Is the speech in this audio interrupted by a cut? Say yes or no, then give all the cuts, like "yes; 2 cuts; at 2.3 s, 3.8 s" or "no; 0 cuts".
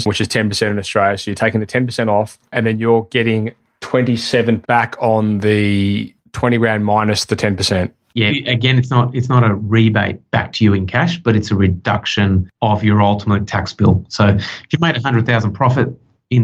yes; 2 cuts; at 4.6 s, 8.3 s